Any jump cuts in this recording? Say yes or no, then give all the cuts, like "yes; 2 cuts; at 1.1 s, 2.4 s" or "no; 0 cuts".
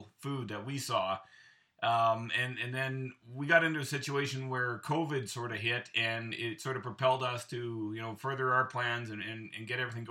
no; 0 cuts